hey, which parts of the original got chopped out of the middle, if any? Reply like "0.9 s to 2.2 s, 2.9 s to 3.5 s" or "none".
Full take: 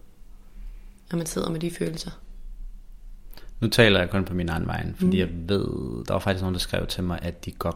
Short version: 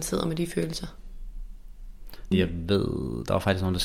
3.6 s to 5.1 s